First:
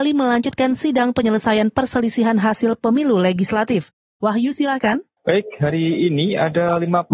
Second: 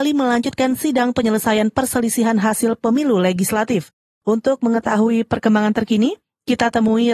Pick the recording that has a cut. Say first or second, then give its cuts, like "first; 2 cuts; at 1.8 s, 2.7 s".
first; 1 cut; at 4.1 s